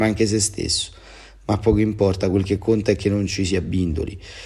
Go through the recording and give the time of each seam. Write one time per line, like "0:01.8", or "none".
none